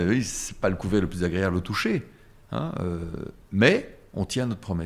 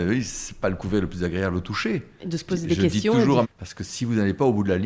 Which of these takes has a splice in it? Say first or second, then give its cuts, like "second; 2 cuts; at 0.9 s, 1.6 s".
second; 2 cuts; at 2.2 s, 3.4 s